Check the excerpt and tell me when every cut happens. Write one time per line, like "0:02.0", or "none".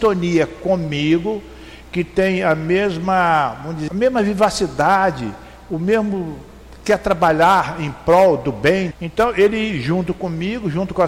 0:03.9
0:08.9